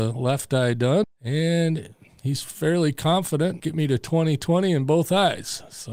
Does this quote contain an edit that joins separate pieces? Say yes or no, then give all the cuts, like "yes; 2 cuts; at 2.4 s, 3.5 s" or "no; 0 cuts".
yes; 2 cuts; at 1.0 s, 3.6 s